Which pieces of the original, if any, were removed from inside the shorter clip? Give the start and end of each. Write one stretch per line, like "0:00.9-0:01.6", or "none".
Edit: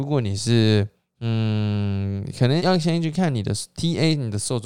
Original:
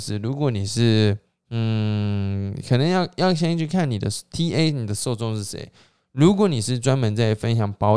0:02.9-0:03.1